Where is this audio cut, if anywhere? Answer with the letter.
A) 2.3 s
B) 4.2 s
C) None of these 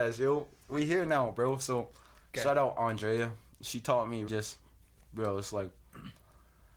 B